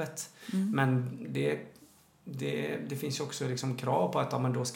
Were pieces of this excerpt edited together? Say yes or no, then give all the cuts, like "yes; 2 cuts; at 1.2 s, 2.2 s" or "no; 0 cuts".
no; 0 cuts